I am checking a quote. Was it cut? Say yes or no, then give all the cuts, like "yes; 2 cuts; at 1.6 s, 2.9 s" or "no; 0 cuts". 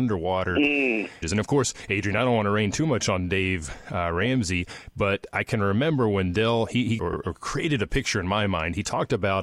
yes; 2 cuts; at 1.2 s, 7.0 s